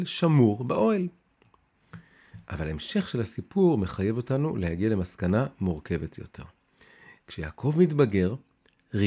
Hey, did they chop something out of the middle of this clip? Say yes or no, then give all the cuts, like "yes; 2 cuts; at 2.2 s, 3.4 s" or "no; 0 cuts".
no; 0 cuts